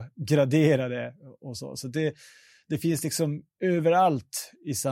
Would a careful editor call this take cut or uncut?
uncut